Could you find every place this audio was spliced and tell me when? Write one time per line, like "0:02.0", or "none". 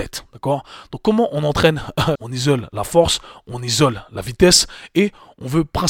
0:02.2

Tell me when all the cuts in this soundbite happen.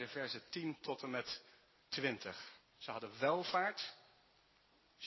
0:02.6

